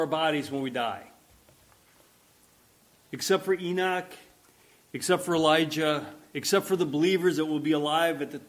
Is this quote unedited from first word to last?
yes; 0 cuts

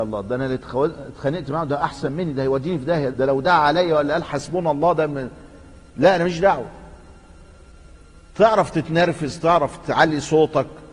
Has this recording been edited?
yes; 1 cut; at 3.1 s

